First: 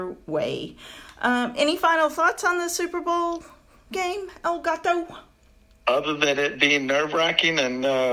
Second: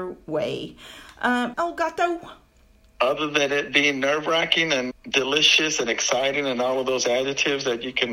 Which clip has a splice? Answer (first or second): second